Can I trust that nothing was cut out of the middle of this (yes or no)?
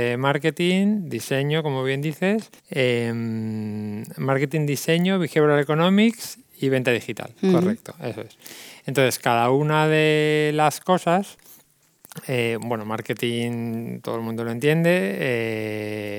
no